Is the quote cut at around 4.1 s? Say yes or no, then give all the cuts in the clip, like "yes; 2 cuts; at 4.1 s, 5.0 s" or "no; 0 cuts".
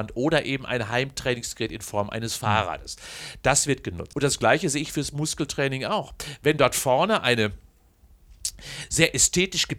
yes; 1 cut; at 4.1 s